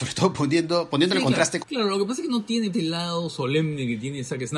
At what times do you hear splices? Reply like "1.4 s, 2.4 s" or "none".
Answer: 1.6 s, 2.7 s